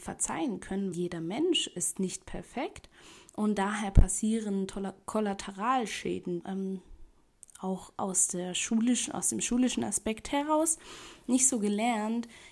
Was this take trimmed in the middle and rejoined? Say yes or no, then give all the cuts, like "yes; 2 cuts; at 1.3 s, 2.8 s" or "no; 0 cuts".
yes; 2 cuts; at 0.9 s, 6.4 s